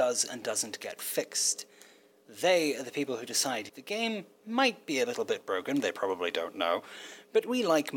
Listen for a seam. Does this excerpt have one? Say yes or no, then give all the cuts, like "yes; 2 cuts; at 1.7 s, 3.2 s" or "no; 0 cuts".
yes; 1 cut; at 3.7 s